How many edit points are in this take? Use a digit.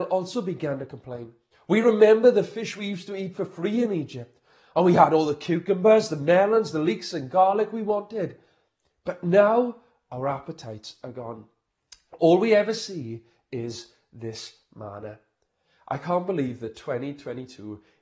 1